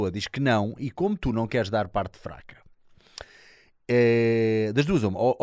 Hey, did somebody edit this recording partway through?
no; 0 cuts

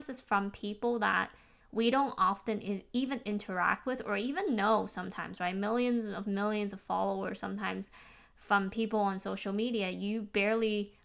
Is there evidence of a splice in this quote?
no; 0 cuts

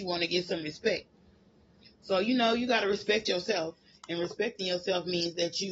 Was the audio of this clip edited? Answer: no; 0 cuts

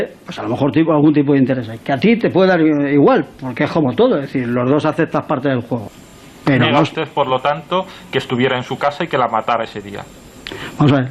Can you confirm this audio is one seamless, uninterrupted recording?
yes; 0 cuts

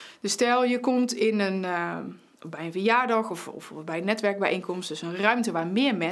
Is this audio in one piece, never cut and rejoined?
yes; 0 cuts

